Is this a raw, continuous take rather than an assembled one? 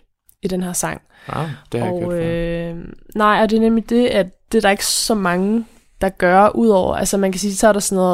yes; 0 cuts

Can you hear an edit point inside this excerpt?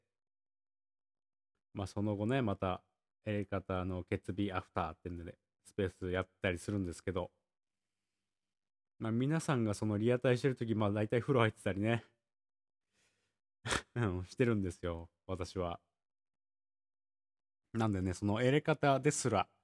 no; 0 cuts

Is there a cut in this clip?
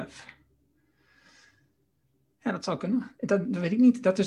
no; 0 cuts

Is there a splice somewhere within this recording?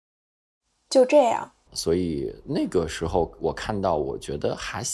yes; 1 cut; at 1.7 s

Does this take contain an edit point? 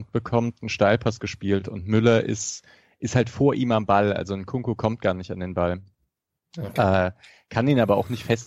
no; 0 cuts

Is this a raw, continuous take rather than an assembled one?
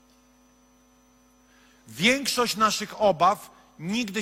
yes; 0 cuts

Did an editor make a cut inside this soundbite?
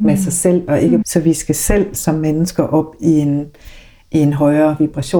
yes; 1 cut; at 1.0 s

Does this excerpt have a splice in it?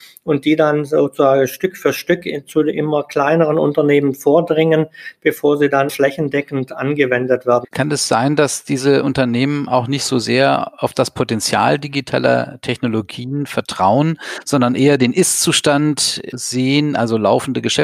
yes; 2 cuts; at 5.9 s, 7.6 s

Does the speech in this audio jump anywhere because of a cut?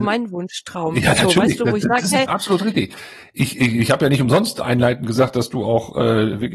no; 0 cuts

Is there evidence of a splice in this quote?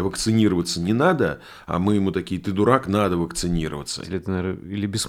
yes; 1 cut; at 4.0 s

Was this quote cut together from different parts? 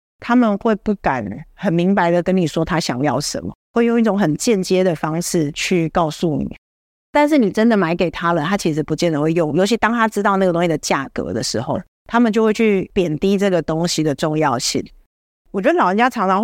no; 0 cuts

